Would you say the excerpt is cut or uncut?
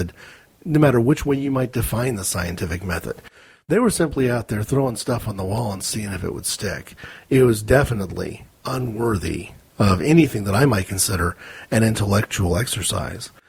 uncut